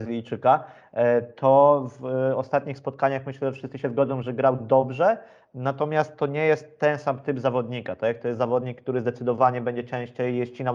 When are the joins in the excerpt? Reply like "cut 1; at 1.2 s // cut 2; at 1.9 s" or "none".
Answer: none

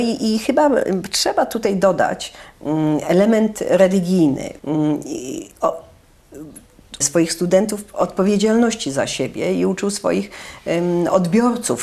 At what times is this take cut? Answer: cut 1; at 4.6 s // cut 2; at 7.0 s

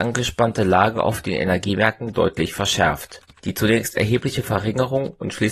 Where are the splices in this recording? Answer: cut 1; at 3.3 s

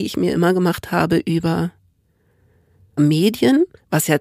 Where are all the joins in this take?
cut 1; at 3.0 s

